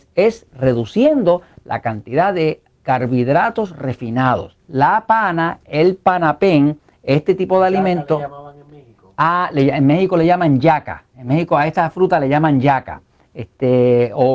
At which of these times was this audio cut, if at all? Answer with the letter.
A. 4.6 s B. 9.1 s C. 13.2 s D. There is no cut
A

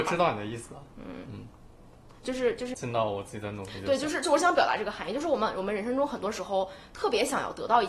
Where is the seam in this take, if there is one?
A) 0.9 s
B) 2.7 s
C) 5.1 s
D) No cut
B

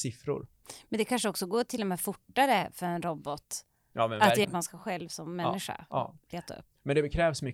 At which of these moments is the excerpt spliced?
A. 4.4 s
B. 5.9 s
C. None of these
A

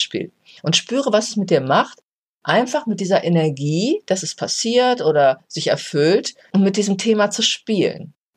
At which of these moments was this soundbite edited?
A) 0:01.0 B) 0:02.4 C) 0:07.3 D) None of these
D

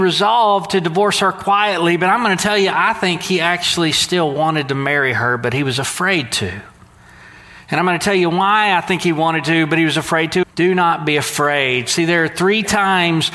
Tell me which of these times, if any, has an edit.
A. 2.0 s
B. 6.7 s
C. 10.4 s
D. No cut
C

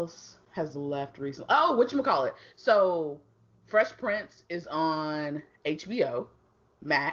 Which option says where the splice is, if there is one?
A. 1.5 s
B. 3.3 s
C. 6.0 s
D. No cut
D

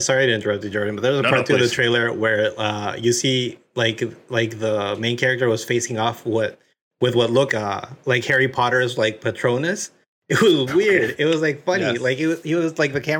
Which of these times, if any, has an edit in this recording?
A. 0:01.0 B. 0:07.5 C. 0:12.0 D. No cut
B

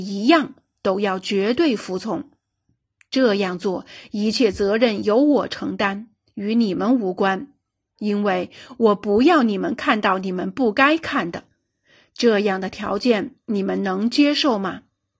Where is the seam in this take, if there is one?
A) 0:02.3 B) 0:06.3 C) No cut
C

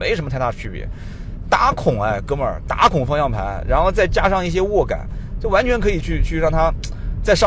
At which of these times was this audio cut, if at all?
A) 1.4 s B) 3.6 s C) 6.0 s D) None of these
C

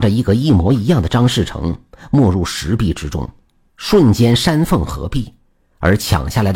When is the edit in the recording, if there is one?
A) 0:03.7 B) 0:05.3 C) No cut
C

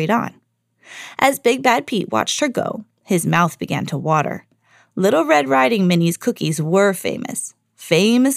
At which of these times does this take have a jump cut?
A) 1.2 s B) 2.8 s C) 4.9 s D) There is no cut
D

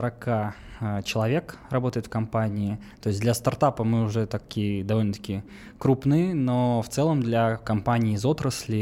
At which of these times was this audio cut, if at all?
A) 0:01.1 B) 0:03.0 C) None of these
C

